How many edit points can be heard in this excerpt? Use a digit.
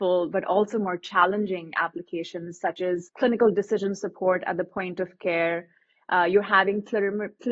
0